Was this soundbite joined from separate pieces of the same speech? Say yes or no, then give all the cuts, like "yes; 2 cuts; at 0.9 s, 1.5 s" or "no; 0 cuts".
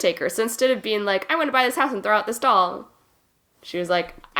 no; 0 cuts